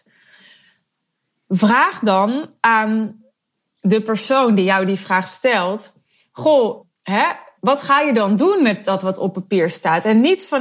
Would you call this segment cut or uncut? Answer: uncut